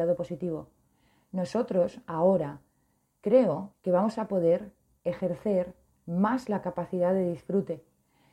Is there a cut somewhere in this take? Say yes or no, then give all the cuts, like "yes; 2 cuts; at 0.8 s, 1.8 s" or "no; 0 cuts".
yes; 1 cut; at 3.7 s